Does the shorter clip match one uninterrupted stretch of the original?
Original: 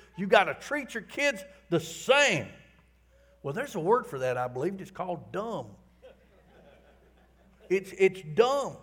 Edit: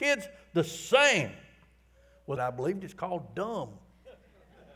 no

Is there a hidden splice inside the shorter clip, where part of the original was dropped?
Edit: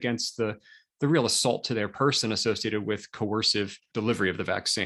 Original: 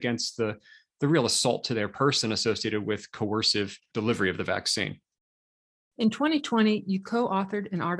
no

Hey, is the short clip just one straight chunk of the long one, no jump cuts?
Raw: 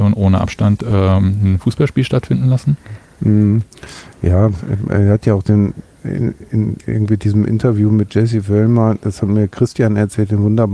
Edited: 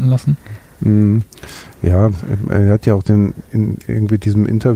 no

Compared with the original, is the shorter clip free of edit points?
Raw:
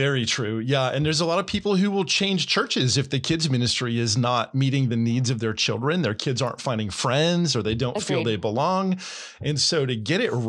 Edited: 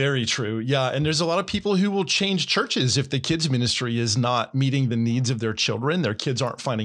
yes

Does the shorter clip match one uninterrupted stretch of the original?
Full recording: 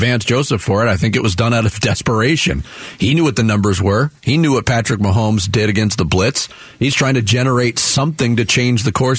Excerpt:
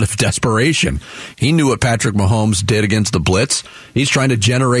no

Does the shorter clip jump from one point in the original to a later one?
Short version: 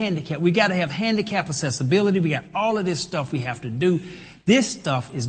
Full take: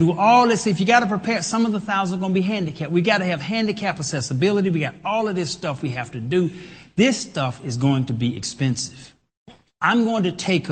no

